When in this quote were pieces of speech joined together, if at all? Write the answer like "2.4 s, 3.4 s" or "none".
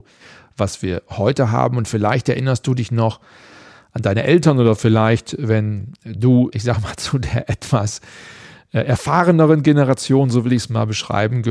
6.5 s